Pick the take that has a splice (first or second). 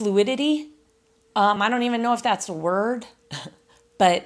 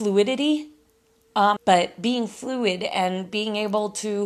second